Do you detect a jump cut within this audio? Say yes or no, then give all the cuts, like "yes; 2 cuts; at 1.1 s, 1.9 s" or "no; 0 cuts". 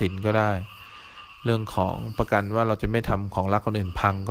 no; 0 cuts